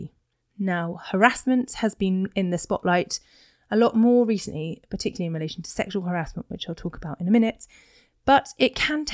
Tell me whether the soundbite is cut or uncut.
uncut